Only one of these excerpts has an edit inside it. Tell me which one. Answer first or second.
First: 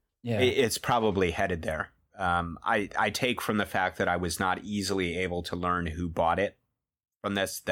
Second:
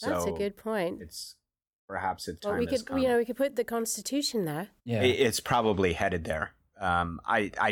second